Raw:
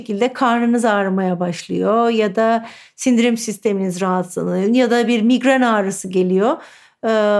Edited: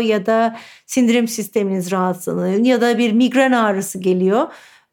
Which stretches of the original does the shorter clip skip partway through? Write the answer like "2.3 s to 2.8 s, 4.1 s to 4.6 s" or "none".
none

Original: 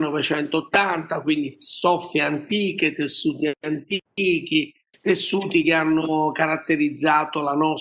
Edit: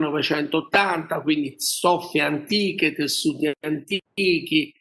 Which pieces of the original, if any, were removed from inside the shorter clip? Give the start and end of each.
none

